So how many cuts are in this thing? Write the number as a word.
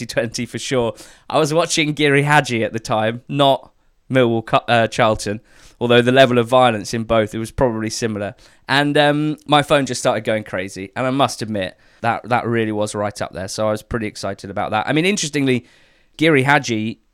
one